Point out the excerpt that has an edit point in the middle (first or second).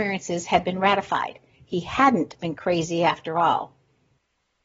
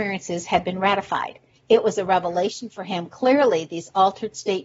second